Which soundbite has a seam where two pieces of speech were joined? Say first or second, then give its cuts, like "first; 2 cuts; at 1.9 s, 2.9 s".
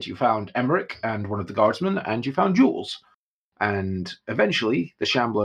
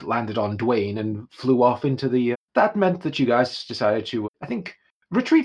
second; 2 cuts; at 2.3 s, 4.2 s